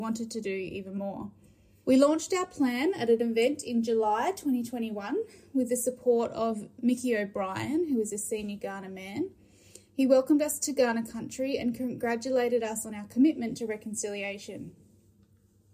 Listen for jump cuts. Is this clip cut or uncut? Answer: uncut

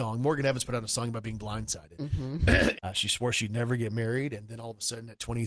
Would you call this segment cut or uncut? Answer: cut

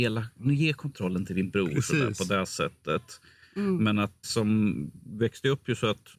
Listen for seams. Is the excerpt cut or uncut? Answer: cut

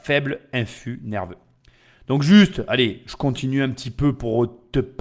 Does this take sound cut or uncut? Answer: uncut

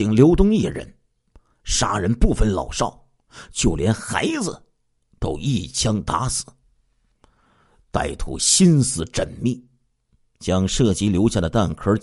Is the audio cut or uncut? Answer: uncut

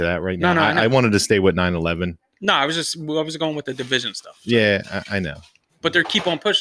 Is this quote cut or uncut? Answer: uncut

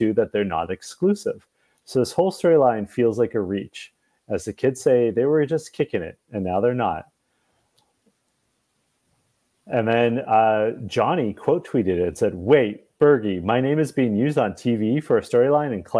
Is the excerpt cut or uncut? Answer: uncut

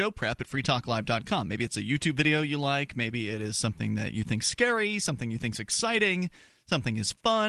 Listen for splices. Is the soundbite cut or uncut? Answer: uncut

